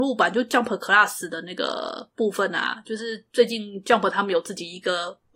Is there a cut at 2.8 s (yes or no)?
no